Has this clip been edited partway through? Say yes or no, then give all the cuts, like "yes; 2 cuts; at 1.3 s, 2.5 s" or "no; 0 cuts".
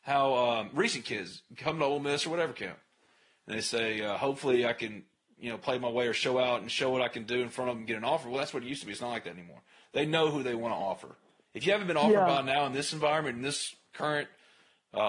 no; 0 cuts